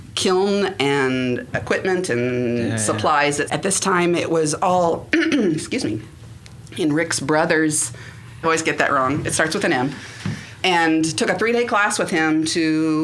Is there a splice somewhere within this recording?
yes; 3 cuts; at 3.5 s, 8.4 s, 10.6 s

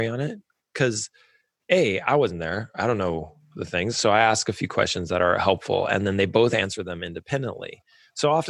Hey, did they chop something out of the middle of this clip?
no; 0 cuts

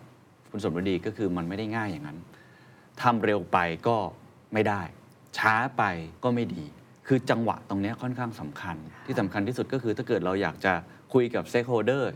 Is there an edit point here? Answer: yes; 1 cut; at 6.2 s

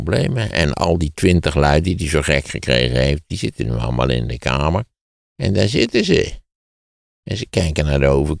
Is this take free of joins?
yes; 0 cuts

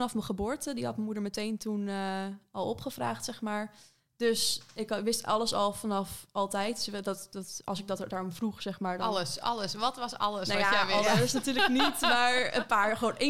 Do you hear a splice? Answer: no; 0 cuts

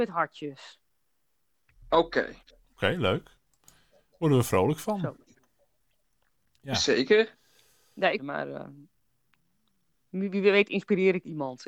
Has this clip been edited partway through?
yes; 1 cut; at 8.2 s

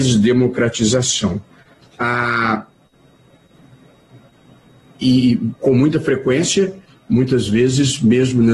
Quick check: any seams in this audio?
no; 0 cuts

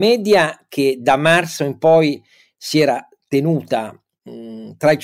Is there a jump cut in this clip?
no; 0 cuts

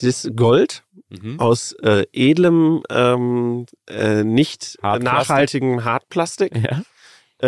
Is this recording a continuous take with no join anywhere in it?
yes; 0 cuts

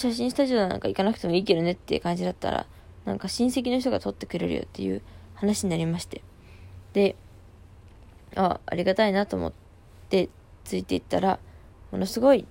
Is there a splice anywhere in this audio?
no; 0 cuts

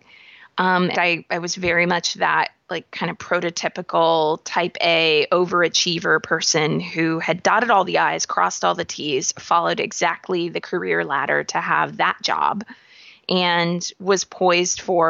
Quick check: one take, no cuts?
no; 1 cut; at 0.9 s

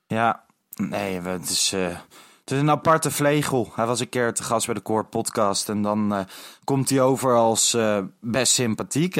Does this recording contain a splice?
no; 0 cuts

